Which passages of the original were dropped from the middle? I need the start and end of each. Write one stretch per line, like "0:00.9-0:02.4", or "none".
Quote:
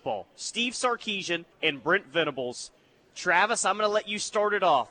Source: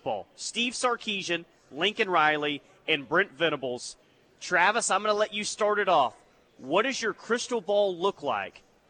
0:01.5-0:02.8